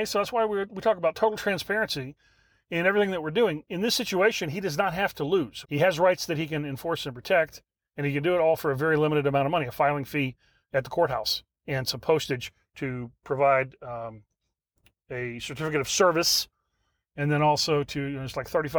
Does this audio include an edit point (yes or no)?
yes